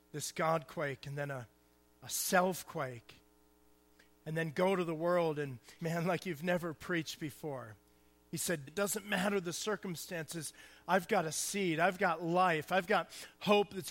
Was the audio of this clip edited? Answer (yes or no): yes